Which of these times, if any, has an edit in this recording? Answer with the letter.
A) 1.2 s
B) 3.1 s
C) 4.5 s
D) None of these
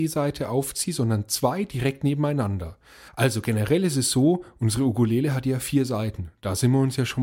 B